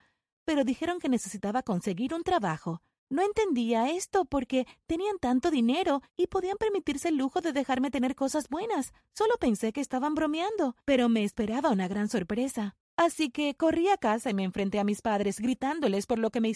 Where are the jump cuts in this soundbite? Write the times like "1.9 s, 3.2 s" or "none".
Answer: 12.8 s